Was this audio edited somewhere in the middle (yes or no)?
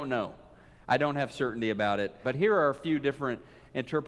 yes